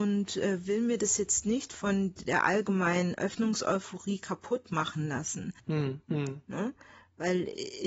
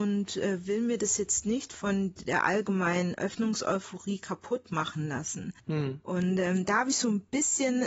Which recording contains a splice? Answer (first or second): first